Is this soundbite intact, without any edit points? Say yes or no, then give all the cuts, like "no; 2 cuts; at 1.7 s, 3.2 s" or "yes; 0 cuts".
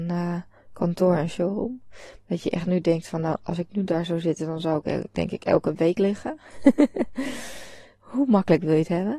yes; 0 cuts